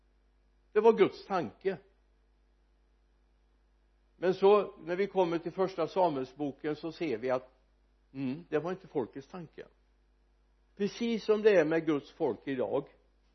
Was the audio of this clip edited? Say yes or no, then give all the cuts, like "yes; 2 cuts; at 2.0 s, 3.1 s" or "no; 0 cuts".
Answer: yes; 1 cut; at 8.5 s